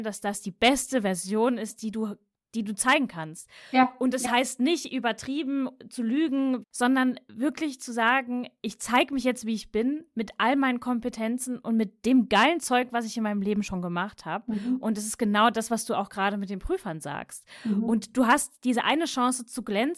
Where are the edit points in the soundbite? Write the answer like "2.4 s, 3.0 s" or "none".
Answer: 6.6 s